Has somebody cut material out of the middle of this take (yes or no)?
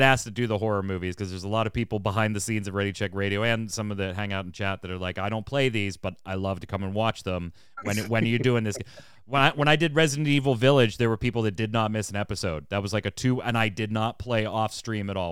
no